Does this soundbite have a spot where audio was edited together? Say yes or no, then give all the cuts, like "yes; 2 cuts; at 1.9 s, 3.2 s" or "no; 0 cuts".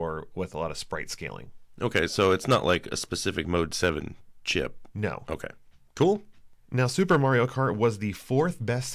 no; 0 cuts